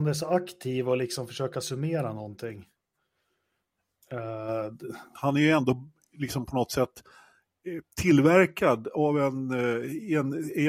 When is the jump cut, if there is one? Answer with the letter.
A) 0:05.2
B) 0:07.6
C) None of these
A